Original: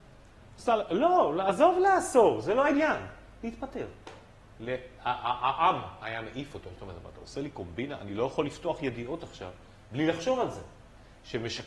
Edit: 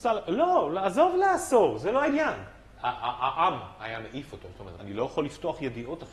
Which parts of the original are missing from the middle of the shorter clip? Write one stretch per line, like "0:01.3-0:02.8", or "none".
0:03.4-0:05.0
0:07.0-0:08.0